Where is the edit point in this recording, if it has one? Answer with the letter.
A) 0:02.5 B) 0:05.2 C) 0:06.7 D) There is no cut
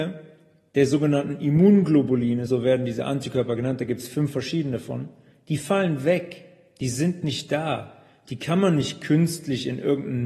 D